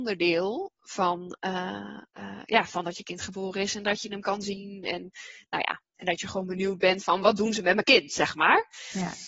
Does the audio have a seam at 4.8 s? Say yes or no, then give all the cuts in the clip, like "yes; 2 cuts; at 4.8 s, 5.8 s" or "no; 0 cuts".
no; 1 cut; at 2.1 s